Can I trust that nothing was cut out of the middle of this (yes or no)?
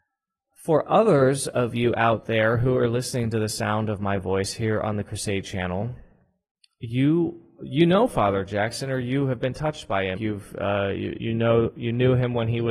no